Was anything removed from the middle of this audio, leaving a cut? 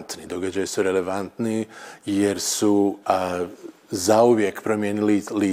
yes; 1 cut; at 3.0 s

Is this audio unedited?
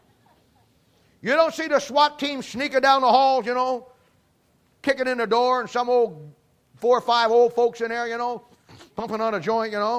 yes; 0 cuts

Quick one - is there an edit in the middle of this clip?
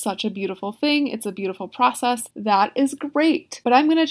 yes; 1 cut; at 2.3 s

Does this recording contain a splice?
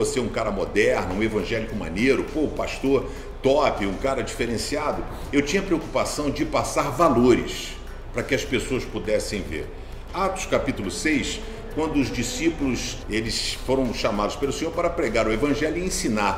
yes; 2 cuts; at 10.1 s, 13.0 s

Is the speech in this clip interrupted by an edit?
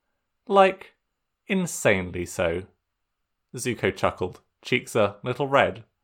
yes; 1 cut; at 3.4 s

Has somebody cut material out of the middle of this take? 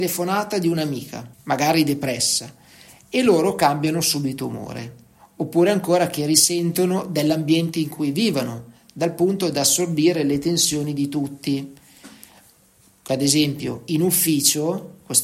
yes; 1 cut; at 1.3 s

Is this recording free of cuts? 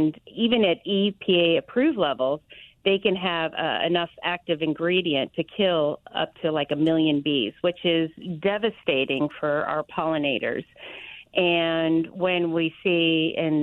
yes; 0 cuts

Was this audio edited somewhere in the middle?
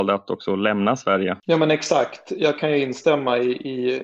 no; 0 cuts

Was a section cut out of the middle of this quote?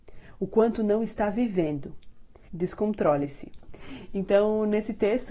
yes; 1 cut; at 2.5 s

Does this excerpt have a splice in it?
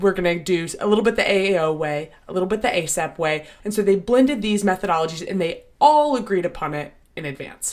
yes; 1 cut; at 3.6 s

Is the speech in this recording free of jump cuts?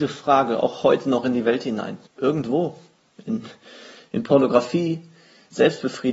no; 1 cut; at 2.1 s

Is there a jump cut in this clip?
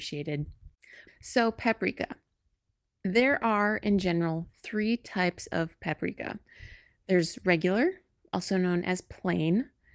yes; 1 cut; at 1.1 s

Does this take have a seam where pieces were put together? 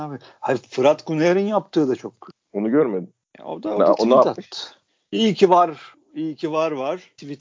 no; 0 cuts

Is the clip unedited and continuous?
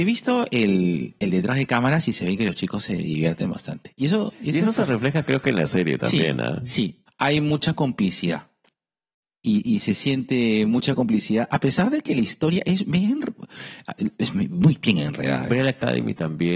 no; 2 cuts; at 7.1 s, 15.5 s

